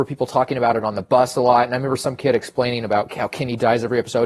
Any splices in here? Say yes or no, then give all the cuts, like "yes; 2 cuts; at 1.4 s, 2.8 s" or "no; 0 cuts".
no; 0 cuts